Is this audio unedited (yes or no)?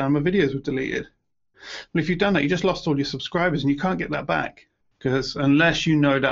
no